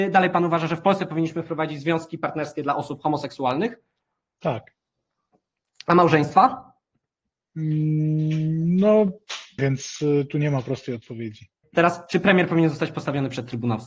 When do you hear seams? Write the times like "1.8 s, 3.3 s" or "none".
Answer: 9.6 s, 11.6 s